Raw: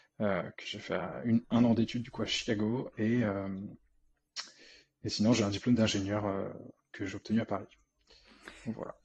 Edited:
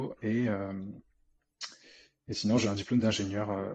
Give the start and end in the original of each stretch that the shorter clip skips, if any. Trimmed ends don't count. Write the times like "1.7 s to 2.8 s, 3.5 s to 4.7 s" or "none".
none